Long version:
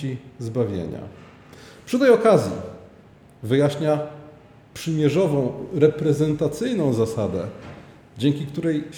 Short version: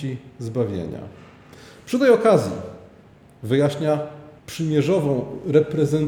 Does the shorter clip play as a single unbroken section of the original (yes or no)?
no